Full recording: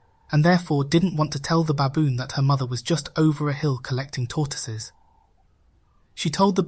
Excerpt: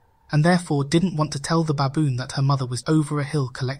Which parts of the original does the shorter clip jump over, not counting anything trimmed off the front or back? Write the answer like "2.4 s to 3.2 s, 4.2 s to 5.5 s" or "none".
2.8 s to 3.1 s